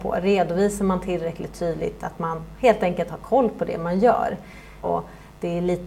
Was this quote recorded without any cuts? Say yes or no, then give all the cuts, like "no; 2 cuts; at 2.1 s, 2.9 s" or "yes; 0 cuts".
no; 1 cut; at 4.8 s